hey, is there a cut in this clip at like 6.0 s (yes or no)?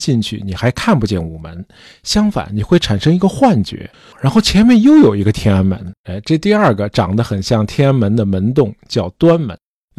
yes